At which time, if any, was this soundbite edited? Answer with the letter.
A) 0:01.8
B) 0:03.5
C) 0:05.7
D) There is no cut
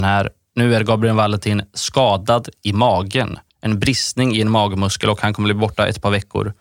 B